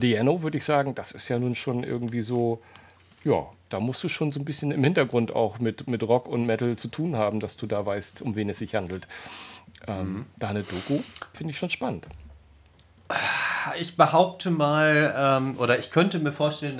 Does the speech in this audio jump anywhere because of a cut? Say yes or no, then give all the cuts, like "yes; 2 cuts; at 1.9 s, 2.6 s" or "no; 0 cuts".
no; 0 cuts